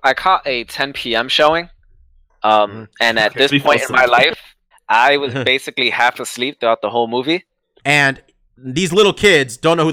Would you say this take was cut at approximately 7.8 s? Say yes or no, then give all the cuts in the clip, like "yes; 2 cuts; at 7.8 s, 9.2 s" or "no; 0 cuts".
yes; 2 cuts; at 4.7 s, 7.8 s